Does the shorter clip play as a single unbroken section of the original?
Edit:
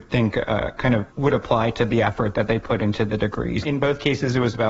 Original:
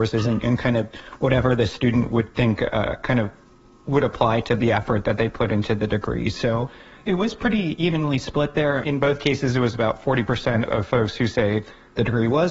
no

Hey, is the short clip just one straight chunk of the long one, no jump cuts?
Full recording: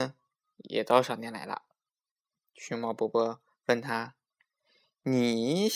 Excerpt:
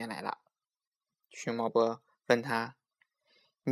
no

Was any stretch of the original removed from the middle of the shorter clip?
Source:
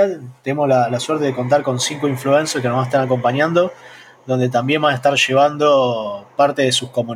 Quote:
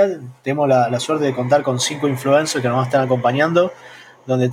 no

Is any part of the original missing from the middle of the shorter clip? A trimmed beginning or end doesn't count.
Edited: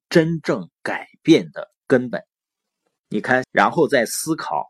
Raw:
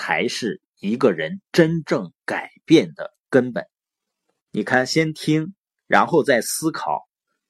yes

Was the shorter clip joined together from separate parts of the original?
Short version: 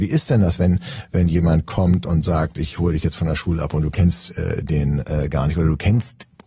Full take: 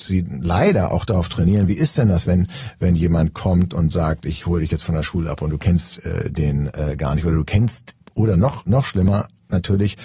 no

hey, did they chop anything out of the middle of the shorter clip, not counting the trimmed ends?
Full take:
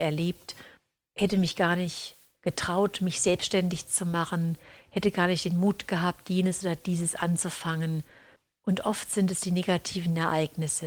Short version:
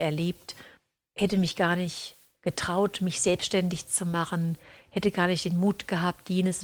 no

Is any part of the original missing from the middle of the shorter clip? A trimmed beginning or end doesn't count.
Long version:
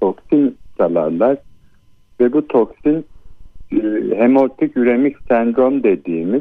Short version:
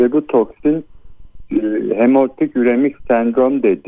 no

